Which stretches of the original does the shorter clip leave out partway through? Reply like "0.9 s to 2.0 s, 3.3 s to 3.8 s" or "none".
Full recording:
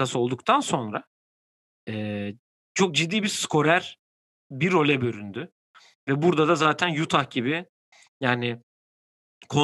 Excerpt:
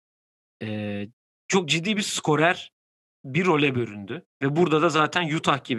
5.6 s to 6.0 s